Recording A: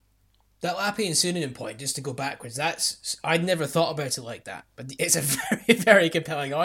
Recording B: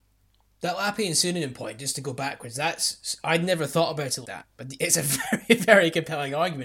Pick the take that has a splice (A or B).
B